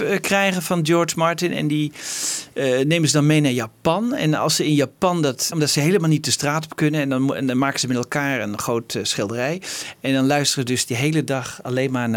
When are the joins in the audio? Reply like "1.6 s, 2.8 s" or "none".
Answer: 5.5 s